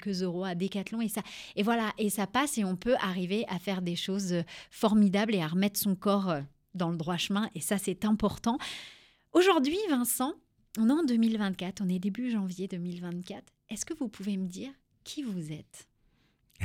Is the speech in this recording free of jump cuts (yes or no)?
yes